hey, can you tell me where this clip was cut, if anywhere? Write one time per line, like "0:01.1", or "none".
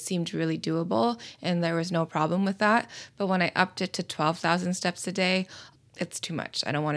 0:05.8

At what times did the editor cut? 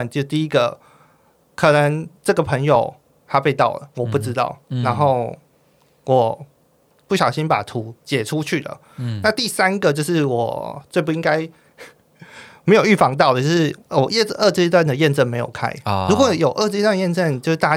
none

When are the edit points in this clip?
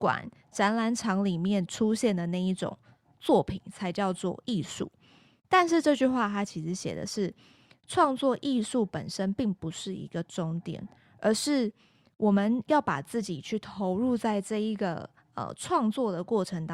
none

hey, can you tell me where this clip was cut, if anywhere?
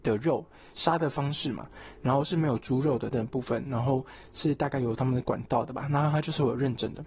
0:03.1

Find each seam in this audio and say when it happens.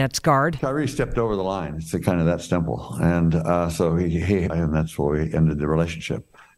0:04.5

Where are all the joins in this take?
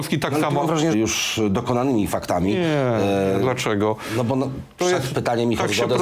0:00.9

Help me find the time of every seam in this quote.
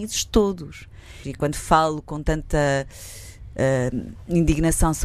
0:01.2

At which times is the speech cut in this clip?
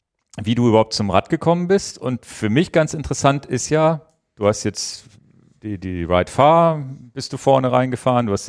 none

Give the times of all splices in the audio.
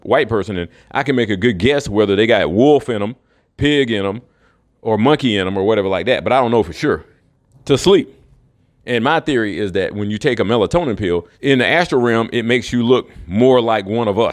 0:07.5
0:11.3

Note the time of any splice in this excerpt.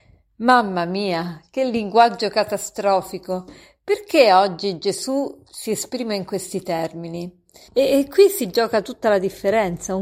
0:07.7

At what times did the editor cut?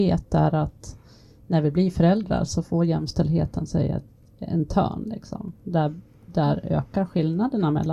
none

